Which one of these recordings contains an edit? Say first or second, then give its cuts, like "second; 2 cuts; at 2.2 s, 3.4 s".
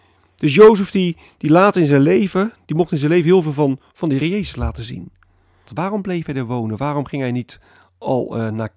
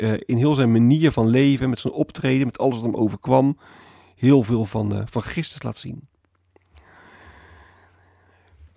first; 1 cut; at 5.7 s